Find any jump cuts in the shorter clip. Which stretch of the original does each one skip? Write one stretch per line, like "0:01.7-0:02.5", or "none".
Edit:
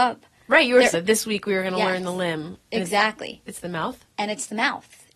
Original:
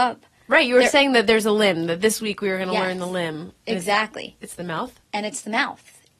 0:00.9-0:01.9